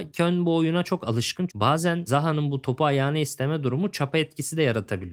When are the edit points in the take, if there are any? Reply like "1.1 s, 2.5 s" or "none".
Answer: 1.5 s